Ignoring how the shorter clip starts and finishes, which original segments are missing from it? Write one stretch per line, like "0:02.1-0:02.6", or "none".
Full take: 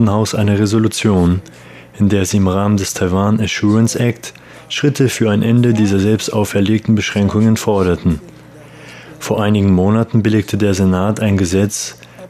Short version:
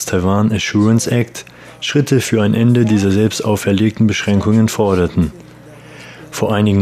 none